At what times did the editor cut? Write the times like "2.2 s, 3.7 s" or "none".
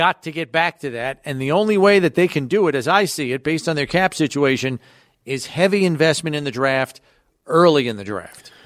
none

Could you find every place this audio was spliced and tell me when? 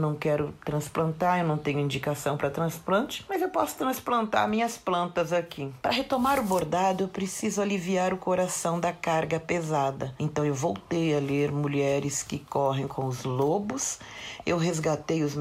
5.8 s

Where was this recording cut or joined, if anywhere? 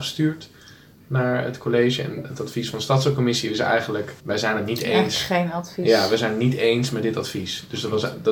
4.2 s

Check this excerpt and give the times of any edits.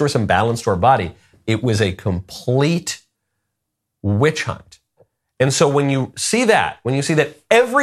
1.3 s

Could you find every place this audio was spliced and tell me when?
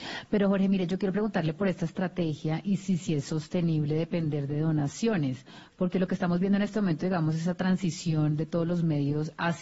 none

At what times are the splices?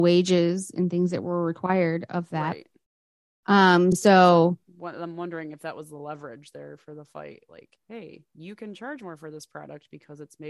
none

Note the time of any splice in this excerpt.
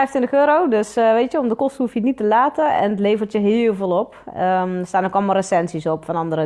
none

